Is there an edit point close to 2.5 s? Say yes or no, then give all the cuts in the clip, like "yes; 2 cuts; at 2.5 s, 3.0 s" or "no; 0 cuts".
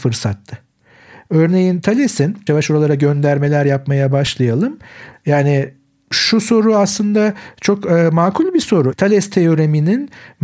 yes; 2 cuts; at 2.5 s, 8.9 s